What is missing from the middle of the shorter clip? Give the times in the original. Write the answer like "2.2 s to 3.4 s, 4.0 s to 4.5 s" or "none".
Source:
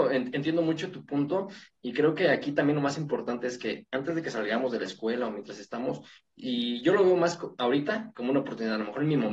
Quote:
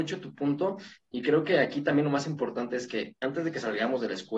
none